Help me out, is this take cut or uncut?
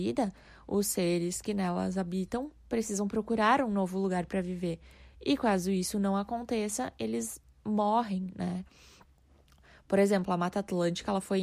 uncut